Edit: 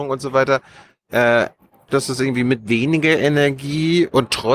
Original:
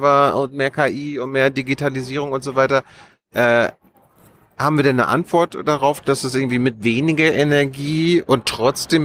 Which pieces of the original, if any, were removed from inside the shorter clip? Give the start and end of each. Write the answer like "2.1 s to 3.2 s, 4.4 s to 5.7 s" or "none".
4.1 s to 6.0 s

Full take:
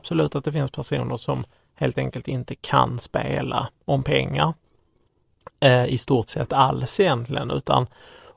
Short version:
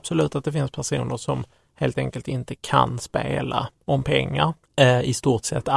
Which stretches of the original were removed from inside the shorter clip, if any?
4.6 s to 5.5 s

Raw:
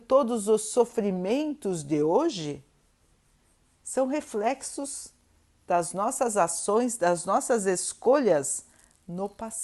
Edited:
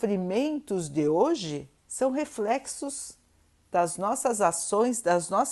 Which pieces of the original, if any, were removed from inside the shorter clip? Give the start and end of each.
2.7 s to 3.7 s

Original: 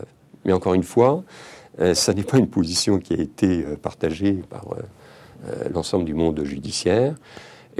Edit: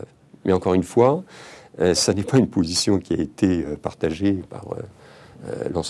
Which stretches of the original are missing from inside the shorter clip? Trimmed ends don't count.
none

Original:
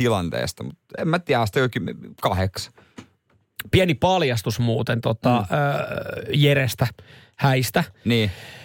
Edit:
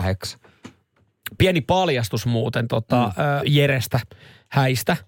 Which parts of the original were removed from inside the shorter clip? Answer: 5.7 s to 6.3 s

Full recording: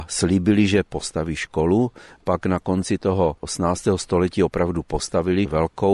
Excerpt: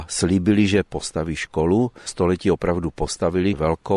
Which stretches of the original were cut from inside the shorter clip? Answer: 2.1 s to 4.0 s

